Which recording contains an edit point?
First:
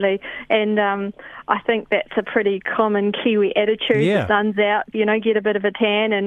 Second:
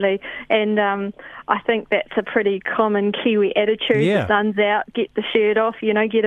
first; 1 cut; at 4.9 s

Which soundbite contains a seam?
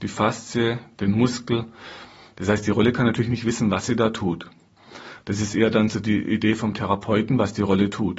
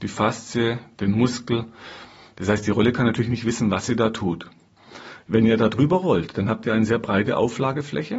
second; 1 cut; at 5.2 s

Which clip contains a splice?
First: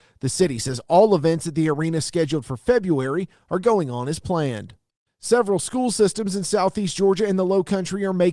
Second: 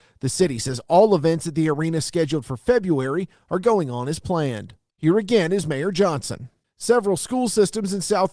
second; 2 cuts; at 5.0 s, 6.6 s

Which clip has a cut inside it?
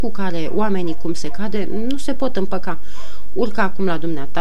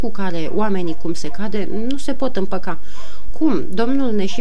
second; 1 cut; at 3.3 s

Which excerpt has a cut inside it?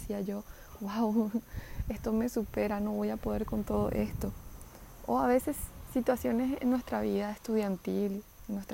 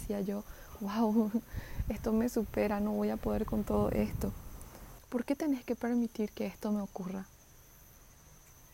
second; 1 cut; at 5.0 s

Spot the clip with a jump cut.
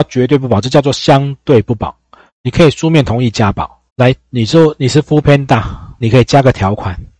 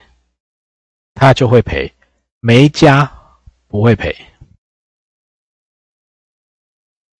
first; 2 cuts; at 3.9 s, 6.0 s

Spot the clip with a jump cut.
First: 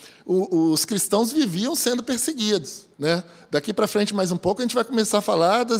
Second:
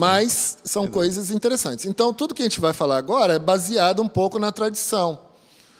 first; 1 cut; at 2.9 s

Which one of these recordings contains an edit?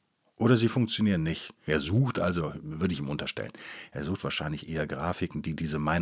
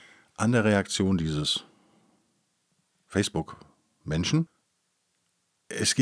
first; 1 cut; at 1.7 s

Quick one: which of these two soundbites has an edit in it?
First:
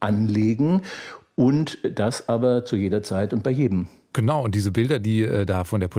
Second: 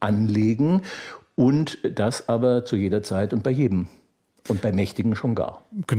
first; 1 cut; at 4.1 s

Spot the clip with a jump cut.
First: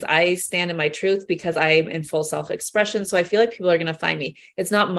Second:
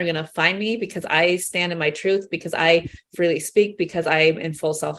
first; 1 cut; at 1.3 s

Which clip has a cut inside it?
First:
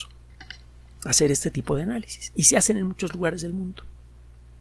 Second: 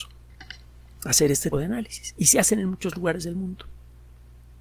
second; 1 cut; at 1.5 s

